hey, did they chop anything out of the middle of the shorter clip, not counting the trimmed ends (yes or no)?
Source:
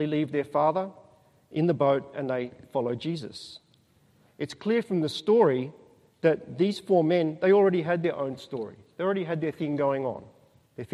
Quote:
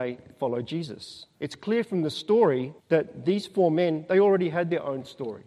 yes